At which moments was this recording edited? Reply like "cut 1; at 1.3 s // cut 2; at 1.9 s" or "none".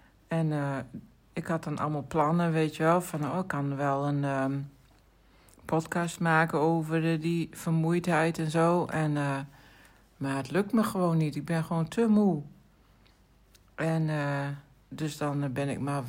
none